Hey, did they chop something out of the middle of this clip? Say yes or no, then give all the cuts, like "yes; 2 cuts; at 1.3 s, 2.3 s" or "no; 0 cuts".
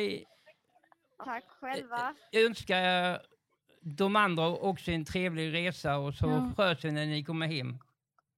yes; 1 cut; at 1.2 s